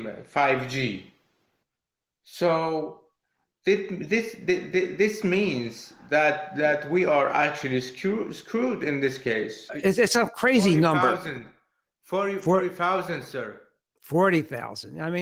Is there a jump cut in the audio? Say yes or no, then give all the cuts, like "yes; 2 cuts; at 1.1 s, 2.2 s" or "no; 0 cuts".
yes; 1 cut; at 9.7 s